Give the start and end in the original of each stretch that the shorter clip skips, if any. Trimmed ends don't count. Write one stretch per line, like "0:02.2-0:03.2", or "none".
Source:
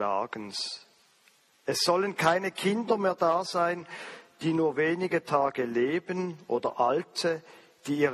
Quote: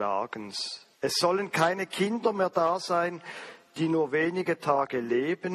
0:00.9-0:01.6

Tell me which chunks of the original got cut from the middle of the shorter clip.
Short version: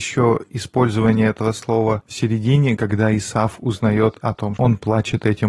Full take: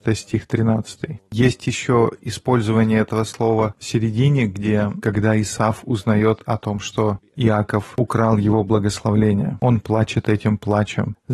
0:04.5-0:05.0
0:06.8-0:09.6

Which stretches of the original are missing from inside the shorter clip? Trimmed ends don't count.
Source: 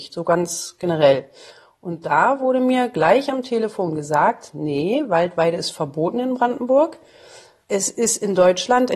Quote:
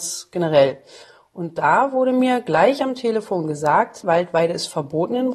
0:04.5-0:05.1

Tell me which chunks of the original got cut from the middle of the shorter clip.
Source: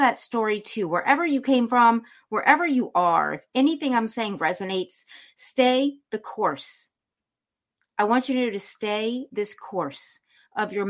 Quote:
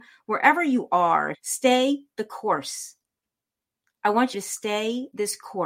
0:03.4-0:05.3
0:08.3-0:08.5

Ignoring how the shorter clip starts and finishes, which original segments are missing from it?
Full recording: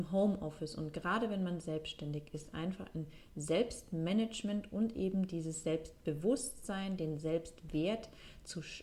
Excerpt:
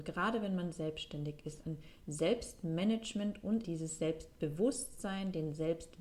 0:02.5-0:02.9
0:04.9-0:05.3

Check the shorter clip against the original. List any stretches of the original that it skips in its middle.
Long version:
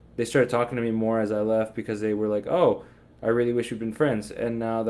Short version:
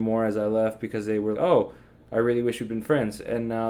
0:02.3-0:02.4

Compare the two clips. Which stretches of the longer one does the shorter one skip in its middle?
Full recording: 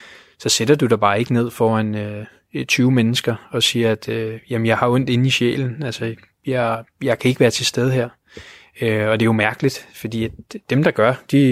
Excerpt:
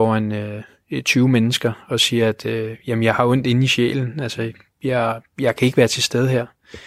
none

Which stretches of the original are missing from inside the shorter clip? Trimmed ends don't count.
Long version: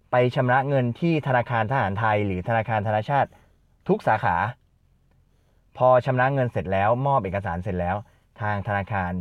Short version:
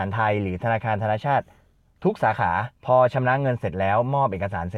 0:04.6-0:05.7

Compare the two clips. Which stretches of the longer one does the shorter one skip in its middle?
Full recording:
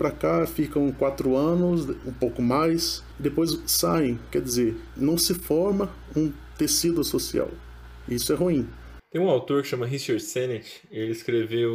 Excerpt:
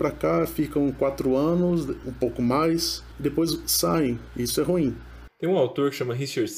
0:04.3-0:08.0

